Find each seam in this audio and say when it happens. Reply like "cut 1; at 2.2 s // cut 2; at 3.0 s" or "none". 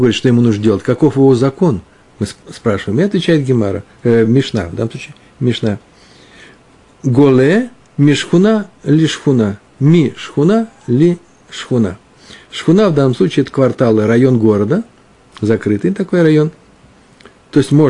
none